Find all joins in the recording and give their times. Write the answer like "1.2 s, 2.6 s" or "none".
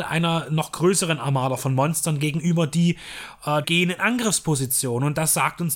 3.6 s